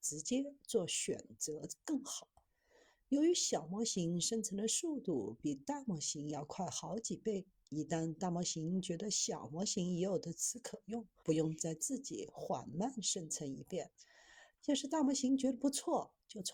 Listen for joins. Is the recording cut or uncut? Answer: cut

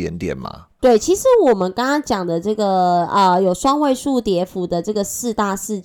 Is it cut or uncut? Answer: uncut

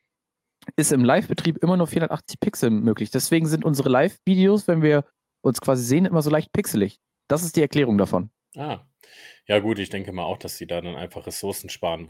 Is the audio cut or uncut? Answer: uncut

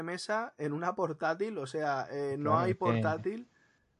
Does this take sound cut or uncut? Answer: uncut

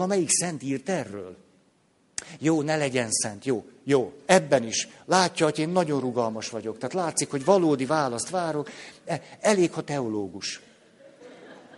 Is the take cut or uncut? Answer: uncut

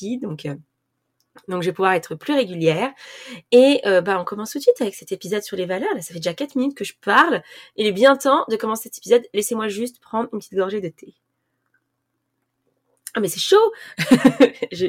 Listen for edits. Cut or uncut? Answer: uncut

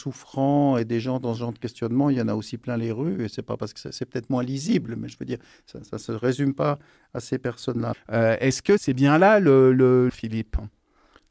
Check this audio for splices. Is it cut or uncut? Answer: cut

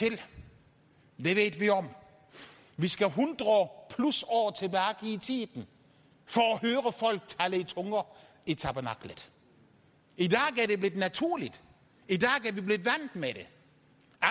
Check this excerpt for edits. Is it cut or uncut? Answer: cut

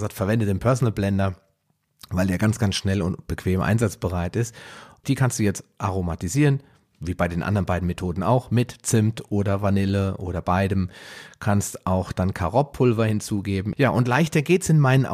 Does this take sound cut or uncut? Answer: cut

